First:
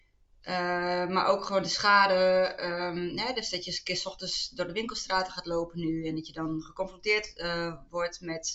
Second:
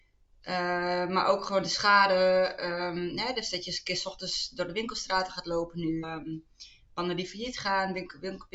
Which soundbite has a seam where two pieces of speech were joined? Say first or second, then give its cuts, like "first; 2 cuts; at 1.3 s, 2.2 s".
second; 1 cut; at 6.0 s